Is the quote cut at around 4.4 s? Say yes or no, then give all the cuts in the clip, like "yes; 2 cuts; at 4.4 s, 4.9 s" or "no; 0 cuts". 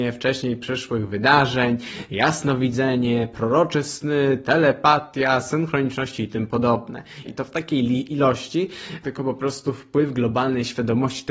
no; 2 cuts; at 7.3 s, 9.0 s